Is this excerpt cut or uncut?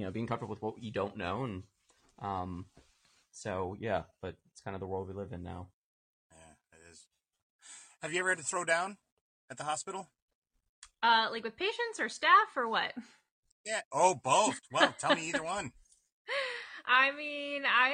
uncut